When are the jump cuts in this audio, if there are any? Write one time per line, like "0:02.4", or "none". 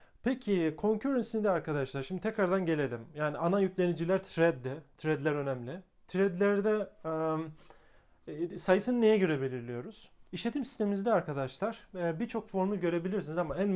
none